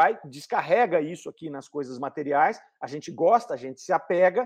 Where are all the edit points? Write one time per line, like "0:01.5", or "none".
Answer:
none